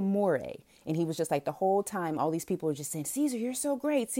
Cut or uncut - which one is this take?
uncut